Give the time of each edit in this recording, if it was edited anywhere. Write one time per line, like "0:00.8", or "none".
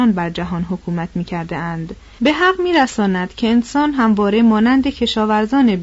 0:02.2